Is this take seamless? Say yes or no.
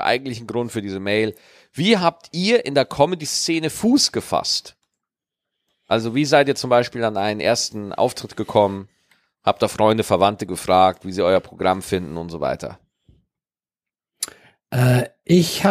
yes